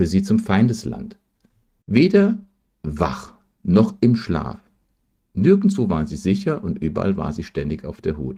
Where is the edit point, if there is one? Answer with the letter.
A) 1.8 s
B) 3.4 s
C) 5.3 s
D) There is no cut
A